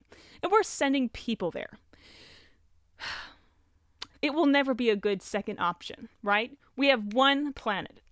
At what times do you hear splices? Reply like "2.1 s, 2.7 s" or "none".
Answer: 4.1 s, 6.1 s